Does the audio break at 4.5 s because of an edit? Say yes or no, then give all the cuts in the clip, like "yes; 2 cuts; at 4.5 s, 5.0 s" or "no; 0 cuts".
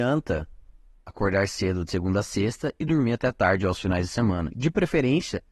yes; 1 cut; at 4.5 s